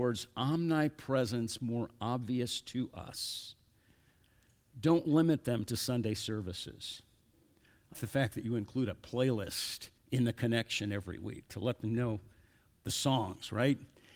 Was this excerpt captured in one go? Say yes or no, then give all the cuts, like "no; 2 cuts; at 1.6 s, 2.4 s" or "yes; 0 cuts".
no; 2 cuts; at 7.9 s, 10.0 s